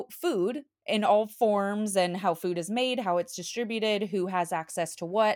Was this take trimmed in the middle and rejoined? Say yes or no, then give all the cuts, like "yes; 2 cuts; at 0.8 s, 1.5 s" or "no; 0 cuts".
no; 0 cuts